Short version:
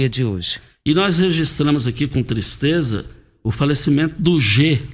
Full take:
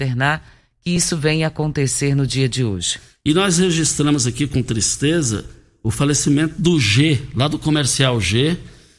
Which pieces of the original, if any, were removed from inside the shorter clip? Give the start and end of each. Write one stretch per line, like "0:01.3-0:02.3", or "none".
none

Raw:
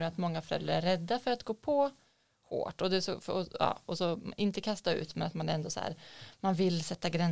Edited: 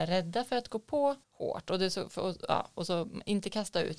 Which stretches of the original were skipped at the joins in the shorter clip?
0:02.0-0:02.3

